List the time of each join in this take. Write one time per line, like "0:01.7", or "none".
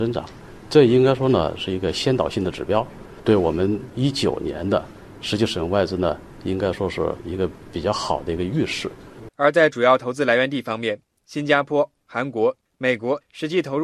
0:09.3